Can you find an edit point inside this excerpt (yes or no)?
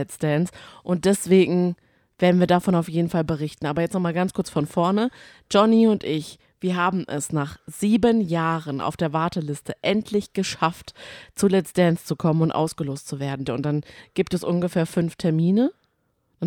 yes